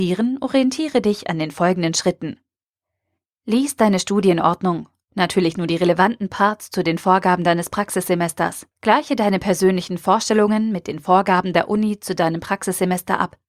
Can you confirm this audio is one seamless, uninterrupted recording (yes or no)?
no